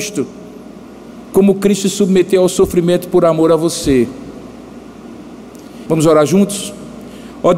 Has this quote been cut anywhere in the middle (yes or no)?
yes